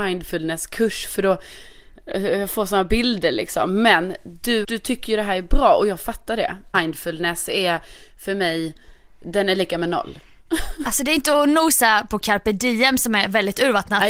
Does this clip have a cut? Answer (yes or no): yes